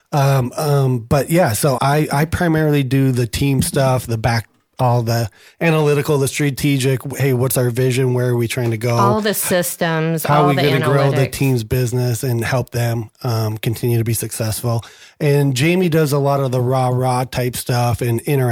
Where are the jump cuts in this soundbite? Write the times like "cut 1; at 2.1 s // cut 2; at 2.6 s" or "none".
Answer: cut 1; at 1.8 s